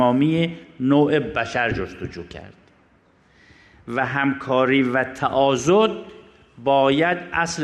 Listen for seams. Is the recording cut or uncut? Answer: uncut